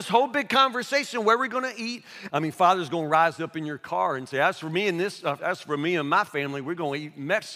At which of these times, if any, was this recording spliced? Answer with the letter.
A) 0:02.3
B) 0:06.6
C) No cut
A